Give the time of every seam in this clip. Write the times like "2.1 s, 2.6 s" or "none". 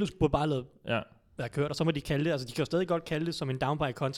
none